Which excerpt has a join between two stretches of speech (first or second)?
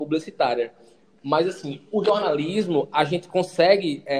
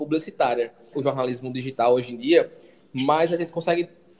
second